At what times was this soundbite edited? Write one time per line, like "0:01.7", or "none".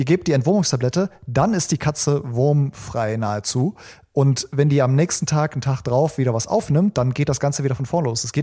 none